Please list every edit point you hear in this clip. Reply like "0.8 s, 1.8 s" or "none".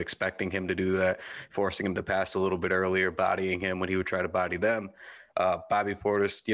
none